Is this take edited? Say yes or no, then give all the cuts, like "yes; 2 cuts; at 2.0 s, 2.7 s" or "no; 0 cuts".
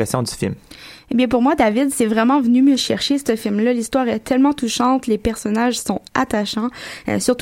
no; 0 cuts